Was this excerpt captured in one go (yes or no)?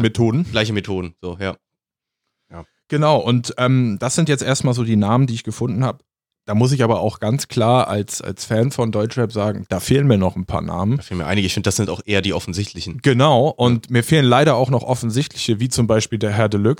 yes